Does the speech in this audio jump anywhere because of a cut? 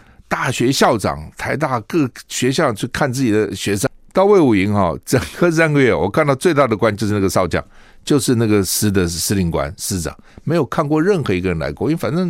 no; 0 cuts

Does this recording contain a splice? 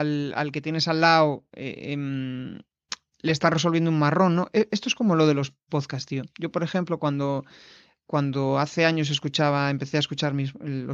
no; 0 cuts

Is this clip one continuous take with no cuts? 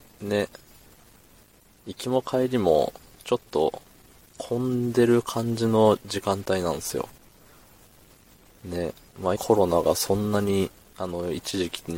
no; 1 cut; at 9.4 s

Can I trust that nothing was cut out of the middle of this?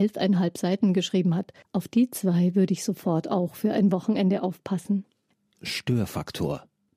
no; 1 cut; at 1.6 s

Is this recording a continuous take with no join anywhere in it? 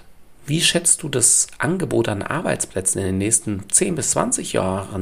yes; 0 cuts

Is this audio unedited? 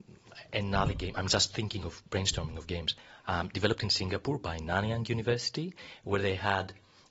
yes; 0 cuts

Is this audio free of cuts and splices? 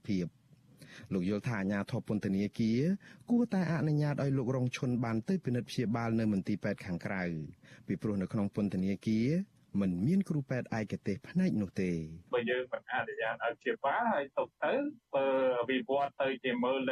no; 1 cut; at 12.3 s

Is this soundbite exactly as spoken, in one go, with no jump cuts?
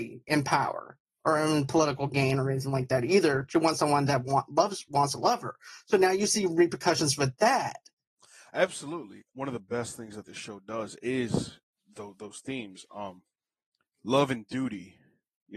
yes; 0 cuts

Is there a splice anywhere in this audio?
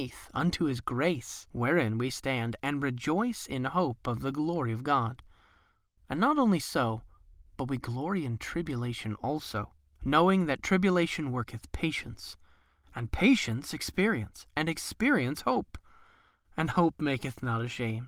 no; 0 cuts

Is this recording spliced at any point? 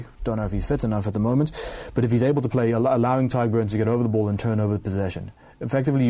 no; 0 cuts

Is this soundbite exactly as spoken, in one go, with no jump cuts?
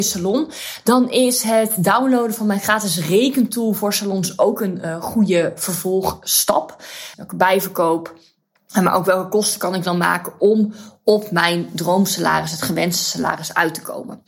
no; 1 cut; at 7.1 s

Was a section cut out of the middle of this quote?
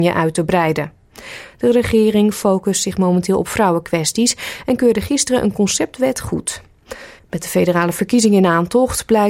yes; 1 cut; at 7.2 s

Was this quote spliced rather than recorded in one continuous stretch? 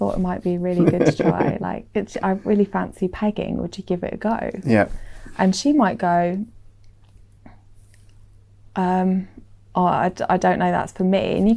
no; 0 cuts

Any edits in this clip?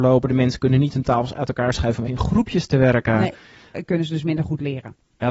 yes; 2 cuts; at 2.1 s, 3.7 s

